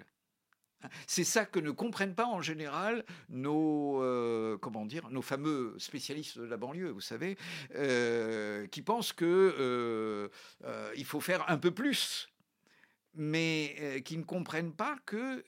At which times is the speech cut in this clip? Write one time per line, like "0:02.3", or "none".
none